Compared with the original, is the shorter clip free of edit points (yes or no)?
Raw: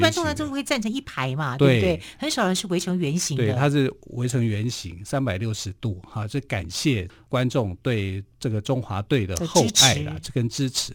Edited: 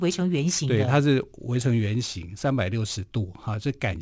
yes